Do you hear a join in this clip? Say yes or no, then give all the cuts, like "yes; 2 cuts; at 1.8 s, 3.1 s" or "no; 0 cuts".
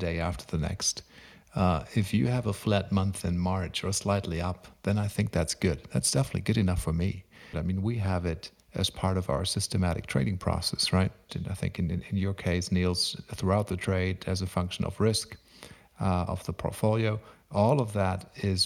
yes; 2 cuts; at 7.5 s, 11.3 s